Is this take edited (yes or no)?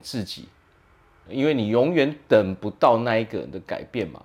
yes